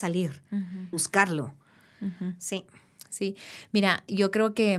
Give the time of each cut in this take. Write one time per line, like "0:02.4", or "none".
0:00.9

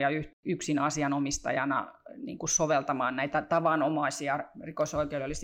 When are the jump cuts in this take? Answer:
none

